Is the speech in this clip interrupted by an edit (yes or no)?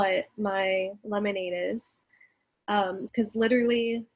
yes